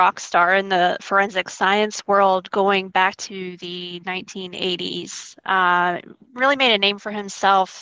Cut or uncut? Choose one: uncut